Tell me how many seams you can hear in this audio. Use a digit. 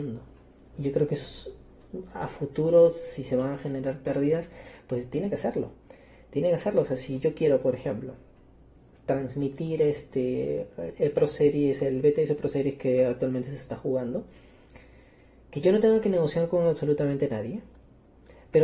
1